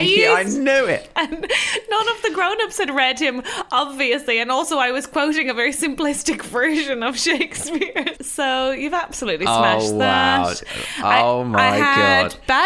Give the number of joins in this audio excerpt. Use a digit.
2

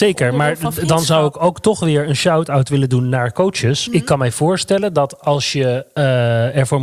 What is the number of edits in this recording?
1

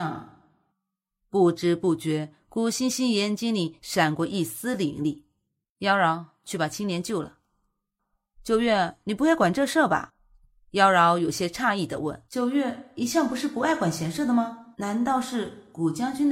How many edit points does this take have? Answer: 3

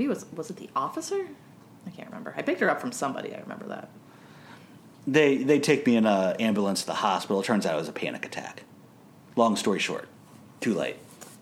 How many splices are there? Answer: 0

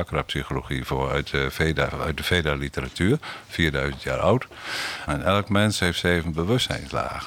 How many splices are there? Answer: 1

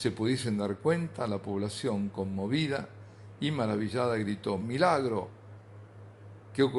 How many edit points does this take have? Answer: 1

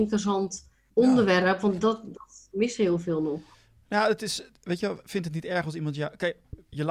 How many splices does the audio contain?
0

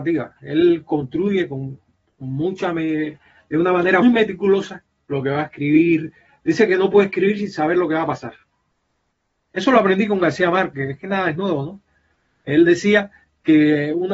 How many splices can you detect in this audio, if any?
2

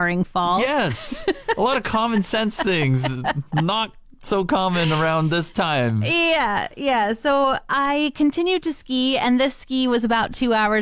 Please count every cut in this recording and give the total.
0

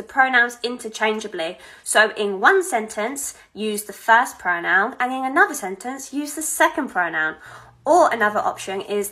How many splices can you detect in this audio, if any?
0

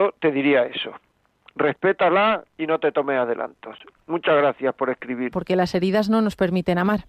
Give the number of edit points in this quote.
1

